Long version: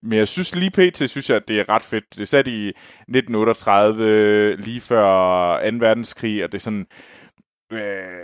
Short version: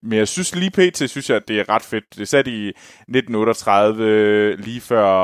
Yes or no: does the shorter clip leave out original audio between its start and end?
no